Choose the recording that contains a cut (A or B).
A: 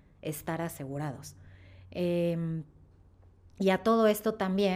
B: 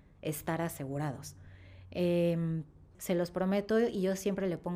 B